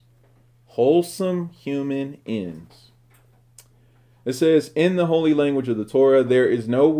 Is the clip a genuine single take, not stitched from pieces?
yes; 0 cuts

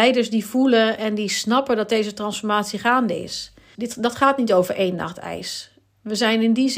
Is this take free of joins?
no; 1 cut; at 3.8 s

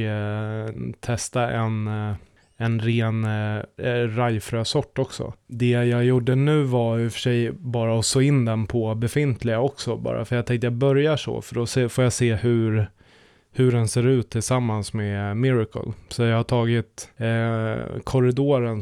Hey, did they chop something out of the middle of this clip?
no; 0 cuts

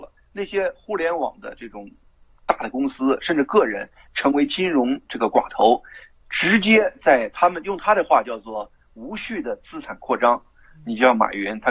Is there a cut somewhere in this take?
no; 0 cuts

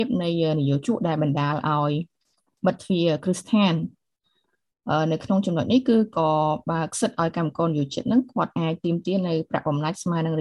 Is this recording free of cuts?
no; 1 cut; at 2.8 s

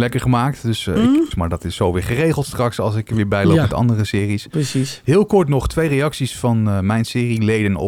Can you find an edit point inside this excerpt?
yes; 1 cut; at 1.3 s

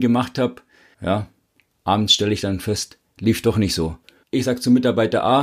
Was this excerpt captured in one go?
no; 2 cuts; at 0.9 s, 4.2 s

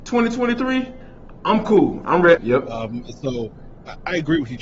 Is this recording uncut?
no; 1 cut; at 2.4 s

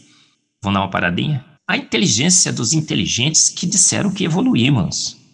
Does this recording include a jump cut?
yes; 1 cut; at 1.6 s

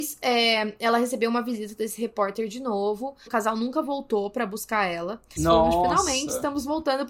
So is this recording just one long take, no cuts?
no; 2 cuts; at 3.3 s, 5.4 s

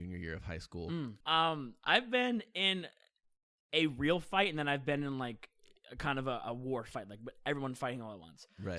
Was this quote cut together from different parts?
yes; 1 cut; at 1.2 s

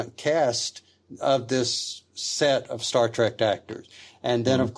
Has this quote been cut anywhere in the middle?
no; 0 cuts

